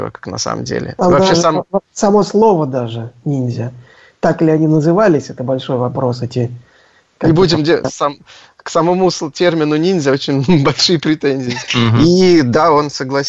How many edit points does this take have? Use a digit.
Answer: 2